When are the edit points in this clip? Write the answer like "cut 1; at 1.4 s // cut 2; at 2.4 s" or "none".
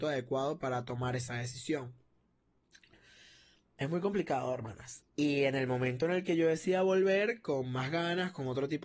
cut 1; at 5.0 s